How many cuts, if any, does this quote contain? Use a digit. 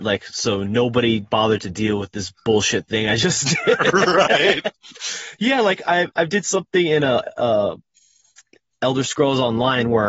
0